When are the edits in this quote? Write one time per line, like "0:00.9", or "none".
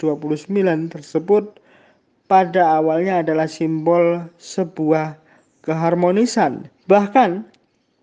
0:06.8